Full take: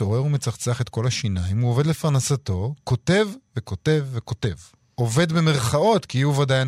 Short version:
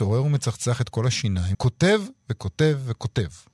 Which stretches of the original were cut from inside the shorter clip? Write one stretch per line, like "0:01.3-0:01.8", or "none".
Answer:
0:01.5-0:02.8